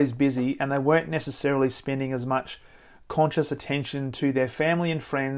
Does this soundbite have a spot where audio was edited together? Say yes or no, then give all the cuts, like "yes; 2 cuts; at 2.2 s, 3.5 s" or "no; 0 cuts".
no; 0 cuts